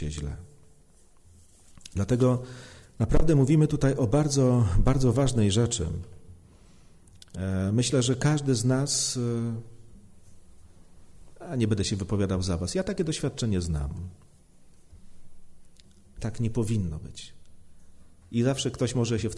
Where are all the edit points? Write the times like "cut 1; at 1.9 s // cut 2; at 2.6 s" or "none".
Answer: cut 1; at 16.2 s // cut 2; at 18.2 s